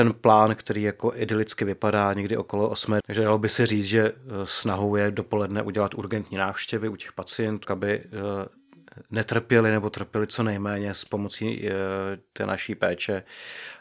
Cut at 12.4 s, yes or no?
no